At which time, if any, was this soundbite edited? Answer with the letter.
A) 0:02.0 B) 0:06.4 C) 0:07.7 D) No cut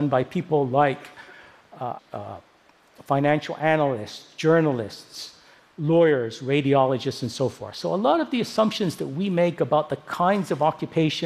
A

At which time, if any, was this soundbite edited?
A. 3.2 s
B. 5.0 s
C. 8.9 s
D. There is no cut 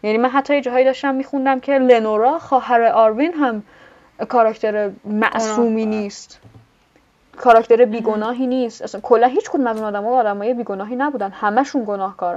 B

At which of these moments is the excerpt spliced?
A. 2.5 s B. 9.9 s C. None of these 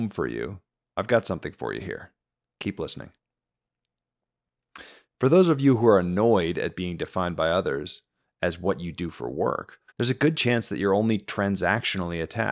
B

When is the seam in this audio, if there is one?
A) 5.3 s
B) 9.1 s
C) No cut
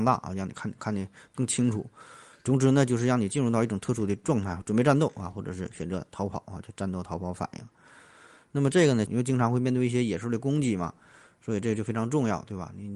B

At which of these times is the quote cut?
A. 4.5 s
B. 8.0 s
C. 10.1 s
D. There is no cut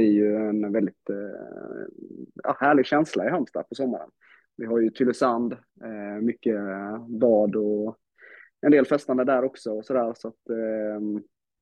D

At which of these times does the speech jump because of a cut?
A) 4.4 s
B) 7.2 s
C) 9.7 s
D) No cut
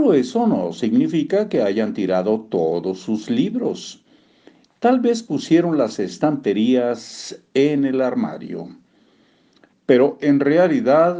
C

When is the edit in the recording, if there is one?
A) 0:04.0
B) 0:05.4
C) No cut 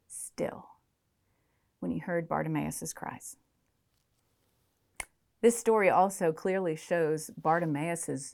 C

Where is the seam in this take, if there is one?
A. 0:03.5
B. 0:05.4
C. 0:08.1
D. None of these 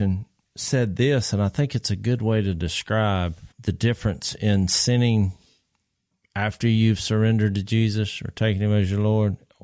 A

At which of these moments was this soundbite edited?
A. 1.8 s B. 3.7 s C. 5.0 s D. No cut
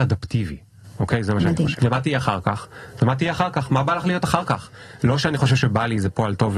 A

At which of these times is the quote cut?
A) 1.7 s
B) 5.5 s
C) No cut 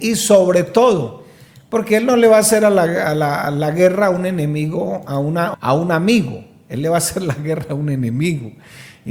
B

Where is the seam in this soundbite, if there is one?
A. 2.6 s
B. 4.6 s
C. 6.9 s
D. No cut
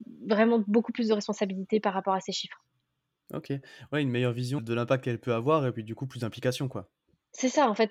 B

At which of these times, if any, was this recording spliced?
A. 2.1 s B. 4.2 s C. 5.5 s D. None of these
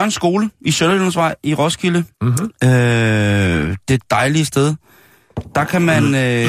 A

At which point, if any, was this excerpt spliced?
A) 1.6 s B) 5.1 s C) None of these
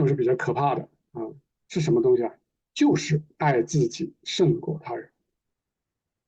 A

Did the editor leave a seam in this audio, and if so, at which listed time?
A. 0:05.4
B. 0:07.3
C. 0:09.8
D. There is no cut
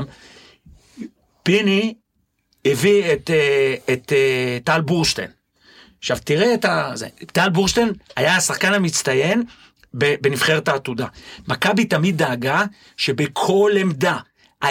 D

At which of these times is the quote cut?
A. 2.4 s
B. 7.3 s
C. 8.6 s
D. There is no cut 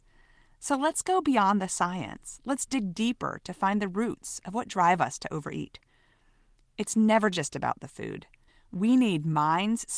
D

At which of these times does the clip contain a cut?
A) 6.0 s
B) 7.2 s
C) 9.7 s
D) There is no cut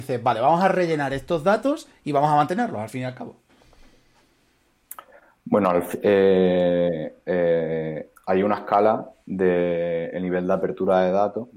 A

